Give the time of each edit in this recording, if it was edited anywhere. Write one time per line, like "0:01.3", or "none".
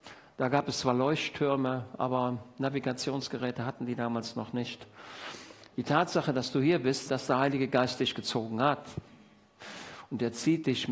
0:05.7
0:07.1